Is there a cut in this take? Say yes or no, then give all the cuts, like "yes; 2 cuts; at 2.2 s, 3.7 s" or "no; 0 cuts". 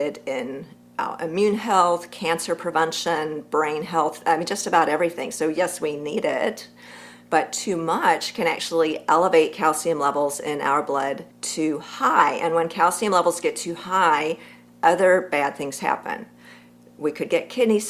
yes; 1 cut; at 11.3 s